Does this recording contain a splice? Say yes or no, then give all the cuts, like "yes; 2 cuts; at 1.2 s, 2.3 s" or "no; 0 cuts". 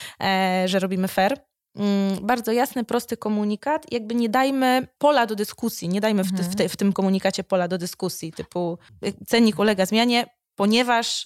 no; 0 cuts